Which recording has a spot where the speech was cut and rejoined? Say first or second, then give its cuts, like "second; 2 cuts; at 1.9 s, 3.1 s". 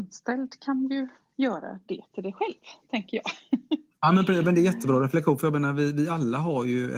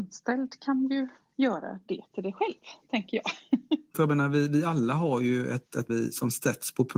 second; 2 cuts; at 3.9 s, 5.9 s